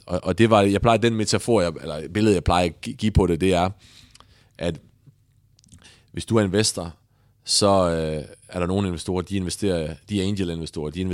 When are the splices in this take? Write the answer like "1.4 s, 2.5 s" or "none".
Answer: none